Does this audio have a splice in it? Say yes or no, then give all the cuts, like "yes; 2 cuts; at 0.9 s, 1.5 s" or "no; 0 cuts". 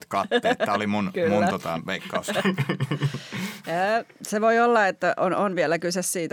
no; 0 cuts